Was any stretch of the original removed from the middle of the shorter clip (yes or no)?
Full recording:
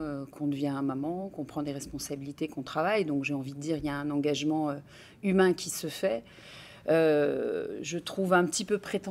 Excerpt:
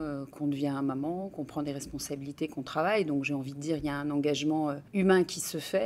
yes